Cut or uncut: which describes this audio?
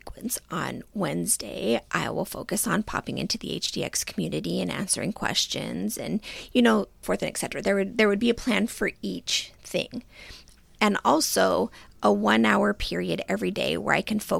cut